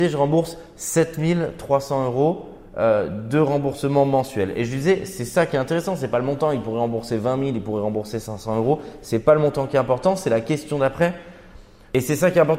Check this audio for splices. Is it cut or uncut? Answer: uncut